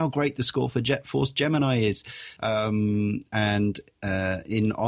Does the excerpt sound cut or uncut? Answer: cut